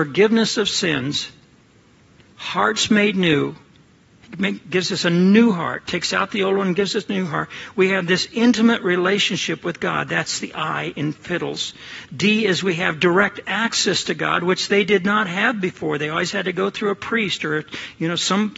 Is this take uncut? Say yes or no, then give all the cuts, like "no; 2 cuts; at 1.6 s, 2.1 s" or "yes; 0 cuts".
yes; 0 cuts